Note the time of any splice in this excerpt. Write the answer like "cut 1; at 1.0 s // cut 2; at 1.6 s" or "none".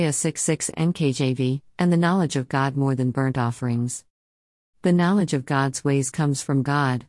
cut 1; at 1.7 s

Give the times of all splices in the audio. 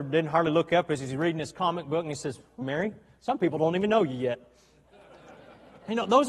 cut 1; at 2.6 s

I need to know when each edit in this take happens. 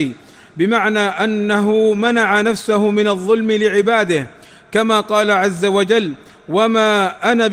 none

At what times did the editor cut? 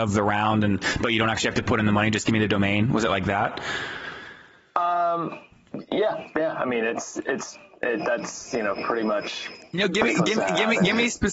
none

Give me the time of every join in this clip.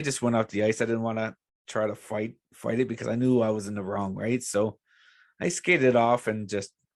none

